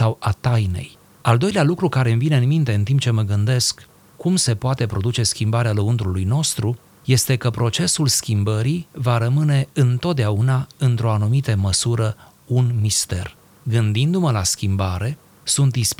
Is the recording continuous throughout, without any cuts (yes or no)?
yes